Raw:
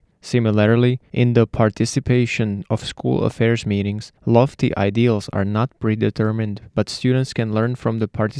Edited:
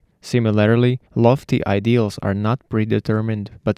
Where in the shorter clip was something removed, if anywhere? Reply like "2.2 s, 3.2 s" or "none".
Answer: 1.1 s